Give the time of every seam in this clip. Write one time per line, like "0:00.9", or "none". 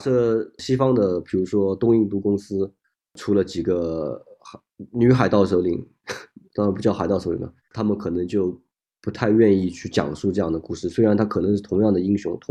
0:07.6